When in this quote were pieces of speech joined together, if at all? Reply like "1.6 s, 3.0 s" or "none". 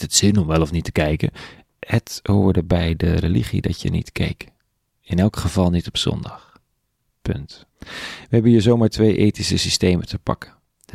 7.7 s